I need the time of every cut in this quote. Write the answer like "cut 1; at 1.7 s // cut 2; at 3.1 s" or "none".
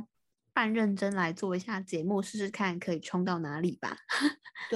none